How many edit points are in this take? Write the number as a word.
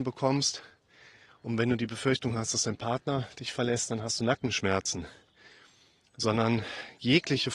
zero